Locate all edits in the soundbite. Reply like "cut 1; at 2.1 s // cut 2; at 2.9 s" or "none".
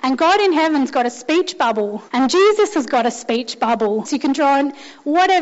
cut 1; at 2.1 s // cut 2; at 4.0 s